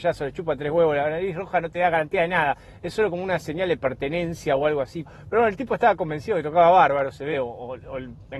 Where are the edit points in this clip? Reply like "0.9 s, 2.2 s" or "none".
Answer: 5.0 s, 7.3 s